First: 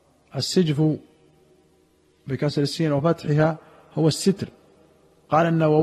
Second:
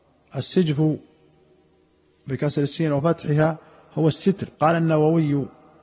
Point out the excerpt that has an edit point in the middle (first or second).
second